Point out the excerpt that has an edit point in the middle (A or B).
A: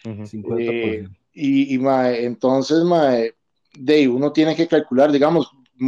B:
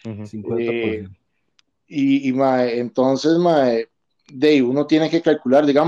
A